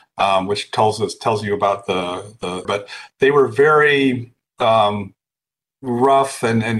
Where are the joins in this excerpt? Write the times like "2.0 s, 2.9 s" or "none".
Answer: 2.6 s